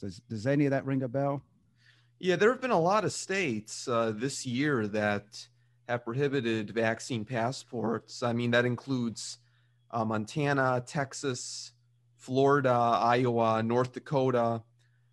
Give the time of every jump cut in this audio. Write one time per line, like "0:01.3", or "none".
none